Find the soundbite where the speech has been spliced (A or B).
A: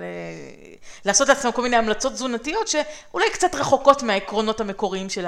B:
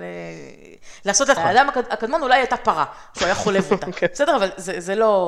B